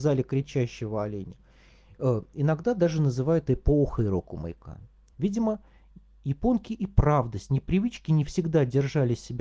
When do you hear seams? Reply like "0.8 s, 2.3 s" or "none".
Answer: 5.1 s